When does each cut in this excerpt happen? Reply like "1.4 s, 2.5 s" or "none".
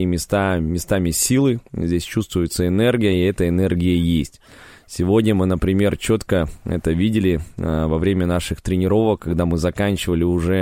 none